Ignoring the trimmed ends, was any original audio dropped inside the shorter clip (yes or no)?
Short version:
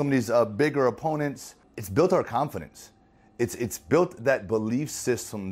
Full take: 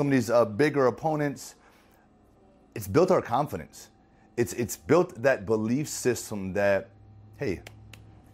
yes